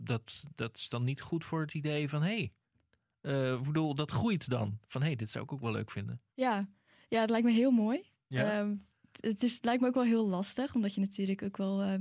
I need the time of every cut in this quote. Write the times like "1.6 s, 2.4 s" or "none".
none